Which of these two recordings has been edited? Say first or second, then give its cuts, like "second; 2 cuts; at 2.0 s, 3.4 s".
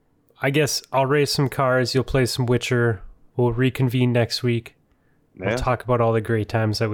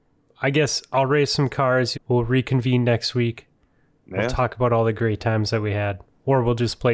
second; 1 cut; at 1.9 s